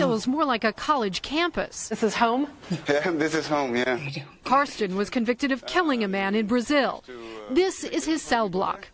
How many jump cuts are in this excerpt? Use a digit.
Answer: 0